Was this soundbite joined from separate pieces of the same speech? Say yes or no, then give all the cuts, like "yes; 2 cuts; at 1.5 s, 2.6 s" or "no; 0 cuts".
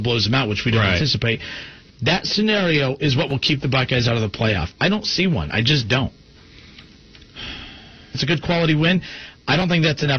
yes; 3 cuts; at 1.9 s, 4.7 s, 8.1 s